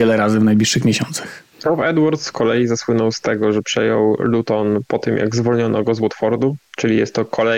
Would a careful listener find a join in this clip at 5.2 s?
no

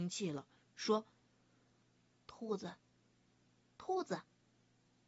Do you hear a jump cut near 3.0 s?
no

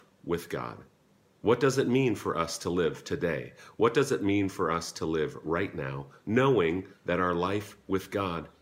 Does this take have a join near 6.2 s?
yes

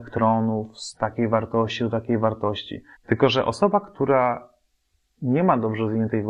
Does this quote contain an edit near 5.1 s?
no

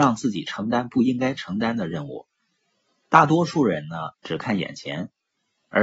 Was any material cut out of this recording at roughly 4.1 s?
yes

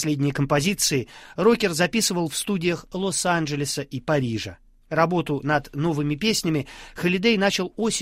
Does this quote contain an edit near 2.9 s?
no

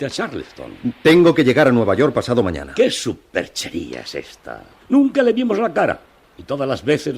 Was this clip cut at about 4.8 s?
yes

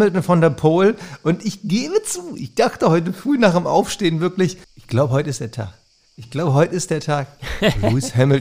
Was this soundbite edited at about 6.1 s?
no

